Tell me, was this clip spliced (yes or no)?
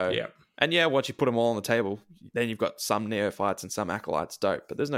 no